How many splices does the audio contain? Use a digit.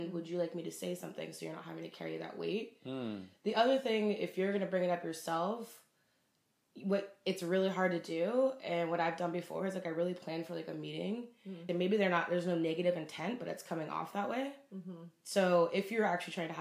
1